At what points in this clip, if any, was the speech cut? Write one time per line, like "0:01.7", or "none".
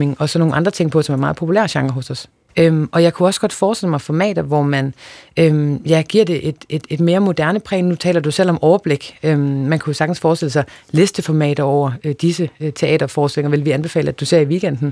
0:02.5